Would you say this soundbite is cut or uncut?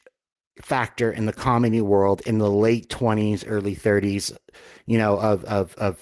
uncut